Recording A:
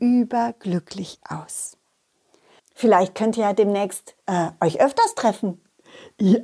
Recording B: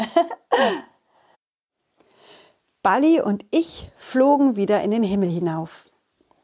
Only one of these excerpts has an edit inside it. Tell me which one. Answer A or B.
A